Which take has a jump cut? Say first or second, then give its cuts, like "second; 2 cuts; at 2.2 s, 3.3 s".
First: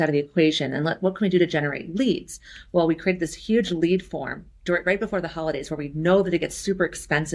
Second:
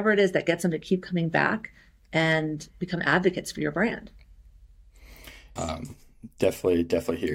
second; 1 cut; at 5.6 s